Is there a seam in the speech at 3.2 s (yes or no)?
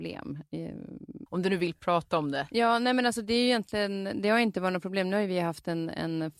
no